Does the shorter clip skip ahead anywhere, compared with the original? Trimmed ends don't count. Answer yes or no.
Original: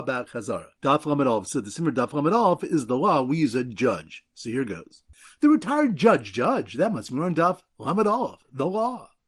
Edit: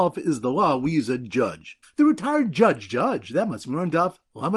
yes